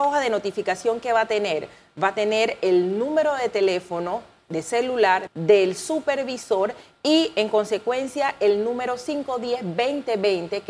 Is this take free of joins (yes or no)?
no